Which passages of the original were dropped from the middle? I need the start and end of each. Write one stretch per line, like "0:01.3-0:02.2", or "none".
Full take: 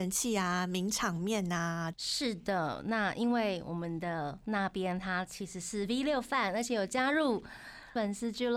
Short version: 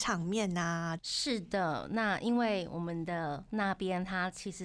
none